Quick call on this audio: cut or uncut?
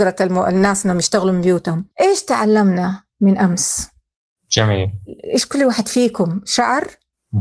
cut